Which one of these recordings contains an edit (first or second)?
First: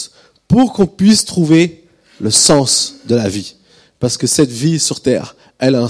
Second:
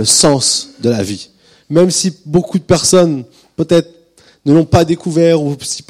second